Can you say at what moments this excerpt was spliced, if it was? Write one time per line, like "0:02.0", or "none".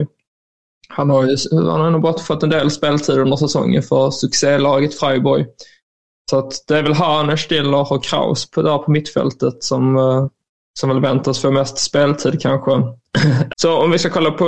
0:13.5